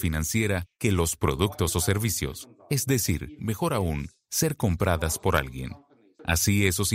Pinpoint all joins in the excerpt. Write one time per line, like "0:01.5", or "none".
0:03.4